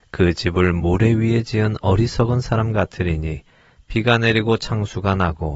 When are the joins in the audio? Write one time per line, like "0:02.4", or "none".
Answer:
none